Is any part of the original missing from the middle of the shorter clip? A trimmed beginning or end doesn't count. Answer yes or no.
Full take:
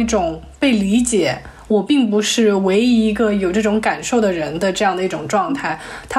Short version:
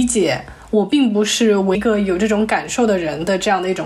yes